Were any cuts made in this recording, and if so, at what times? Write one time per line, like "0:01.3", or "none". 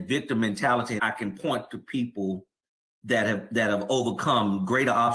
0:01.0